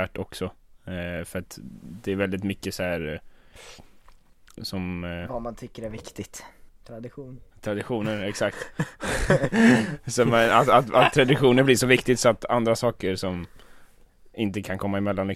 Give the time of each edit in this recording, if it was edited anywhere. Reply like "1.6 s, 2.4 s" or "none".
4.5 s, 6.7 s